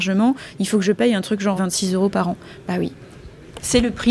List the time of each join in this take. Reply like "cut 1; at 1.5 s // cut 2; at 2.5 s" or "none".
cut 1; at 1.6 s